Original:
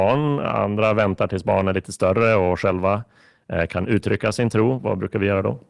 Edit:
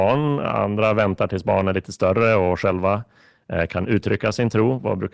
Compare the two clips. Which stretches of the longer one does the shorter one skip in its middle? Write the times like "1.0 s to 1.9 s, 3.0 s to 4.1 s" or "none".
none